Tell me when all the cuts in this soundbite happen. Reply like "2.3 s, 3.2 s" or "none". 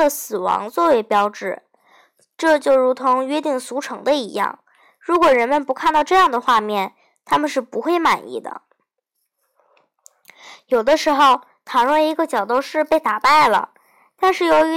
none